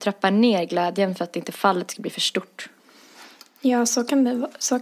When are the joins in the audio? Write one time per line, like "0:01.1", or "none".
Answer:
none